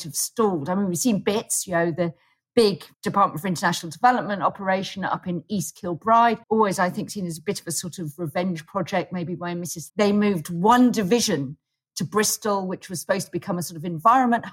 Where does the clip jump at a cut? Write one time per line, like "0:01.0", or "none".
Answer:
0:02.9
0:06.4
0:09.9

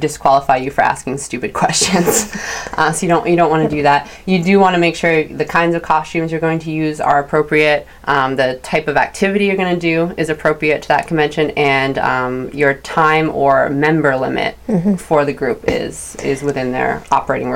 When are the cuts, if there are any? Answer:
none

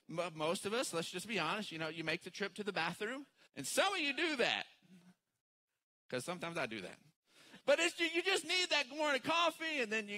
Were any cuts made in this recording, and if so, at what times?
0:03.5
0:07.6

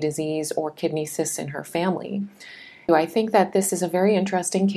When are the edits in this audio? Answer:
0:02.9

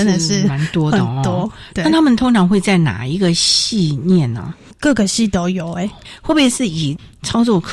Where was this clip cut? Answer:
none

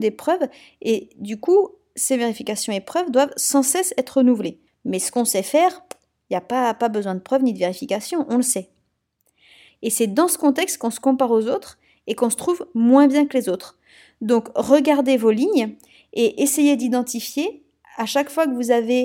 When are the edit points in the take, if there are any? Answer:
0:04.7
0:09.7

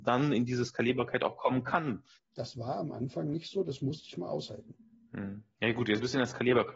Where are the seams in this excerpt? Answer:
0:02.1

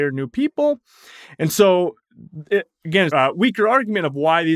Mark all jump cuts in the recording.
0:03.1

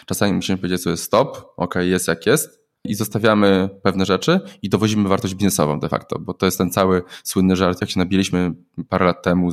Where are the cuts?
0:02.8

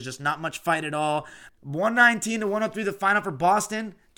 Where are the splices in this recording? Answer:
0:01.5

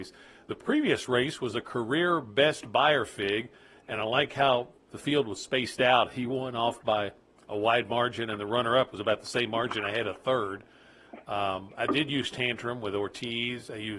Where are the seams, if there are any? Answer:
none

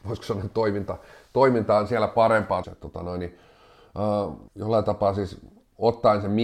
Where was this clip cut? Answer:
0:02.6
0:04.5

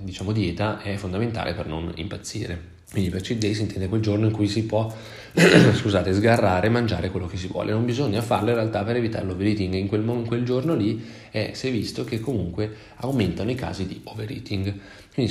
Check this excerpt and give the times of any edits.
0:02.8

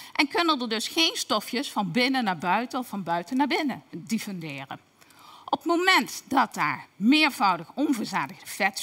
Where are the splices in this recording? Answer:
0:03.9

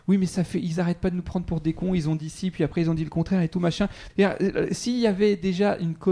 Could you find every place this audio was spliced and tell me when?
0:04.1

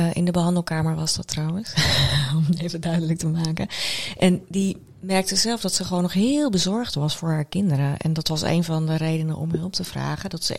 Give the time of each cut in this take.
none

